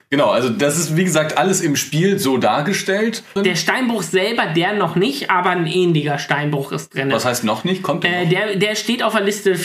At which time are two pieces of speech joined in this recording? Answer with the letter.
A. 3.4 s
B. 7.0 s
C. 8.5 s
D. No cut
A